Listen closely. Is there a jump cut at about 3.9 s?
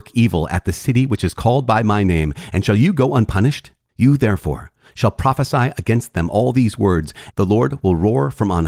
yes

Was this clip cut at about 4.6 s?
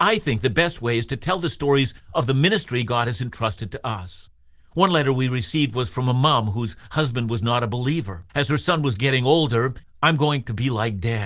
no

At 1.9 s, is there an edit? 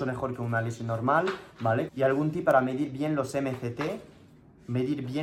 yes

